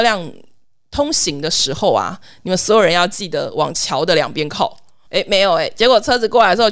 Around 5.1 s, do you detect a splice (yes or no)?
yes